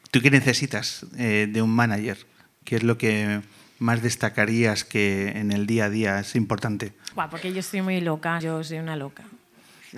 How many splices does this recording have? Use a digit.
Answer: 2